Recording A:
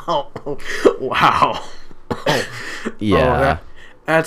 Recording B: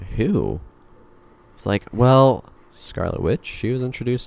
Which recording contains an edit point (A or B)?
B